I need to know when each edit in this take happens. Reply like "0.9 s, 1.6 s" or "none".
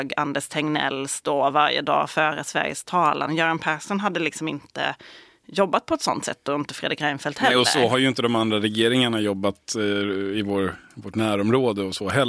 none